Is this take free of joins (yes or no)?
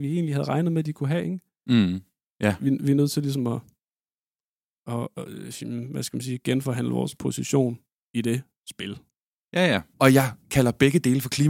no